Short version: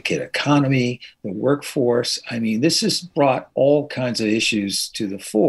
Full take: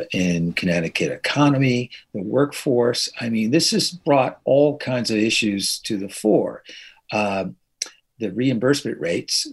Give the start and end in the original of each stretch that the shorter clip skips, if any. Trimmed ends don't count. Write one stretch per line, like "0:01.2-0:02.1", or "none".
none

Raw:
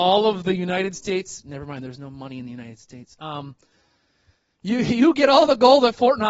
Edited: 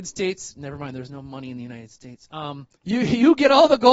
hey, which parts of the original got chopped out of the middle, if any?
0:03.6-0:04.5

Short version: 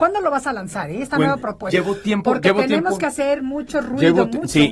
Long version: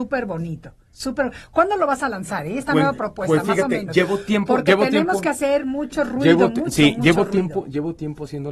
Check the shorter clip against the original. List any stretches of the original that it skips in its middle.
0:03.3-0:03.9

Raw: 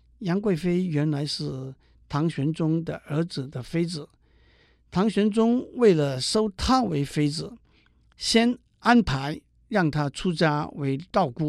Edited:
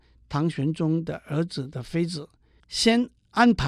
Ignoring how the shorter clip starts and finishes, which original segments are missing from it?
0:04.4-0:08.1

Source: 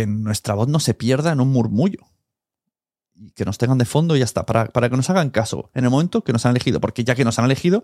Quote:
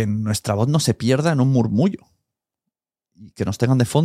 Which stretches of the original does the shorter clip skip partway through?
none

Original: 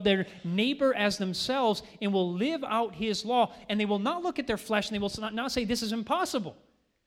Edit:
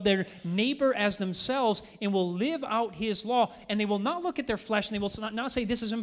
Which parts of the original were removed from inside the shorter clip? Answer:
none

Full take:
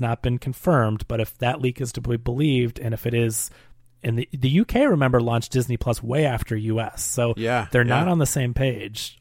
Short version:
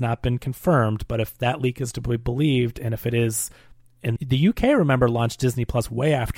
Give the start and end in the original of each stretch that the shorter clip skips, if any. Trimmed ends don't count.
0:04.2-0:04.3

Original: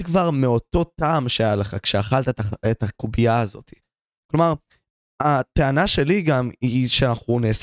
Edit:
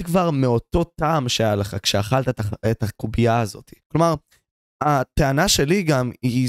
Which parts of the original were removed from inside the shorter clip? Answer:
0:03.8-0:04.2

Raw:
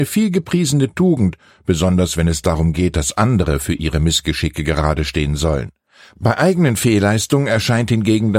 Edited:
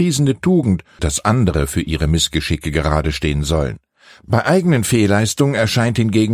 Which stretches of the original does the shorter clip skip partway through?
0:01.5-0:02.9

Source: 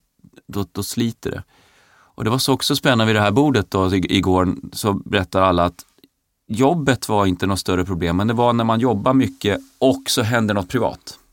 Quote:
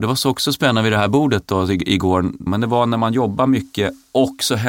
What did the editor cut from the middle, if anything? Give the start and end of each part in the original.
0:04.7-0:08.1

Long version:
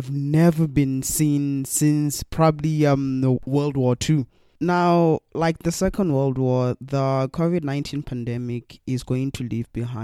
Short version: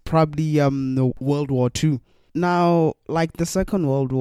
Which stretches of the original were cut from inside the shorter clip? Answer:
none

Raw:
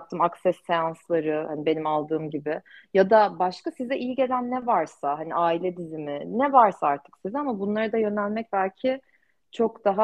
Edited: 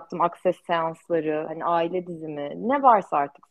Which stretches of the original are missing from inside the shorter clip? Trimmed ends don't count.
0:01.5-0:05.2

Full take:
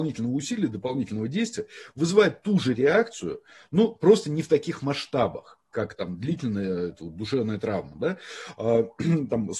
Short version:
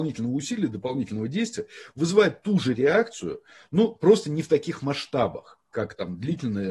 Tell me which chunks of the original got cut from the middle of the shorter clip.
none

